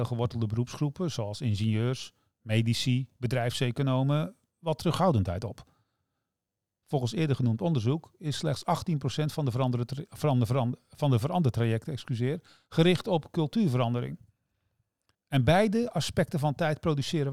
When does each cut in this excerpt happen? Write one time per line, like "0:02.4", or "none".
0:15.1